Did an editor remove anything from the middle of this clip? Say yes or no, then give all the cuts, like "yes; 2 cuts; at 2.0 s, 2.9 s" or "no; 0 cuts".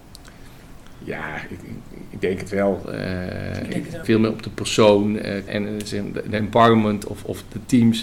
yes; 2 cuts; at 4.0 s, 5.5 s